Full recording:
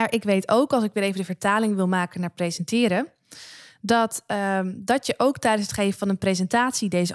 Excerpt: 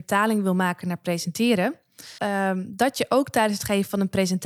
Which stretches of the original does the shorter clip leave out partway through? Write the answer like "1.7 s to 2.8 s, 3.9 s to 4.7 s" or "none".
3.5 s to 4.3 s